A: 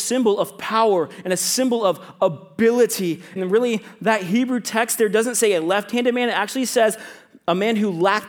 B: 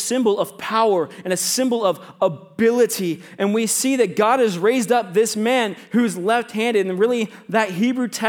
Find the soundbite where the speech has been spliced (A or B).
A